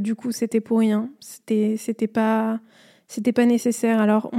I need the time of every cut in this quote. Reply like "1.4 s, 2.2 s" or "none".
none